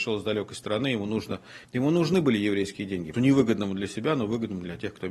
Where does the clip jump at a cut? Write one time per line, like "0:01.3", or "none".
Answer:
0:01.6
0:03.1